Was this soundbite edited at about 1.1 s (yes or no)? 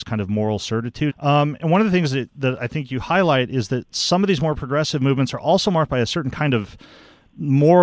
yes